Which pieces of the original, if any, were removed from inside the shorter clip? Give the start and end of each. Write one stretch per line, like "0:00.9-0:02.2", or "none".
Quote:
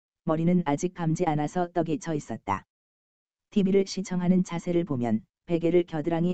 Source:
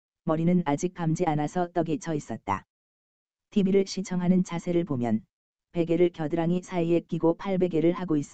0:05.3-0:05.6